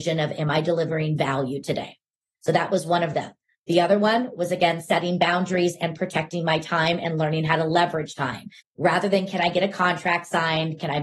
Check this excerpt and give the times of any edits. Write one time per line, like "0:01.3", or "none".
0:08.6